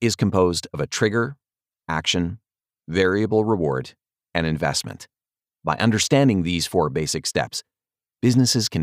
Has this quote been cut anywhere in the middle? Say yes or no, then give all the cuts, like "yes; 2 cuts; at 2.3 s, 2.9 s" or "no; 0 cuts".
no; 0 cuts